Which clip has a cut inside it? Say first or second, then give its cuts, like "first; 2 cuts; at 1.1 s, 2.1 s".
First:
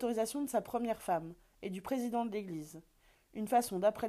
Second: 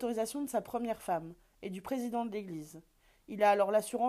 first; 1 cut; at 3.2 s